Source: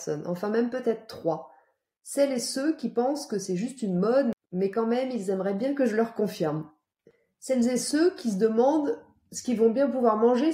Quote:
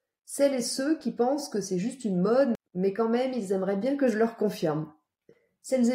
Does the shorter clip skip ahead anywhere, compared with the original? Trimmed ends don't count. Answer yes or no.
no